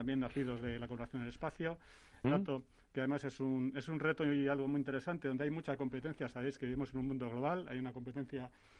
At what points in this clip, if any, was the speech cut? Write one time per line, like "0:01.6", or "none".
0:02.2